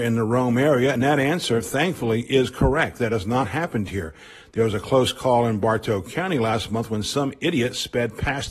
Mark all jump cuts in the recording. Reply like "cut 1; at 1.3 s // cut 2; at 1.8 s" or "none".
none